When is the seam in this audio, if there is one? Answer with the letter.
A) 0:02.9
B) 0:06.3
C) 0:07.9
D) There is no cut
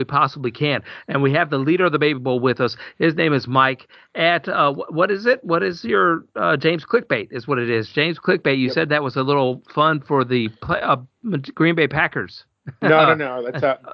D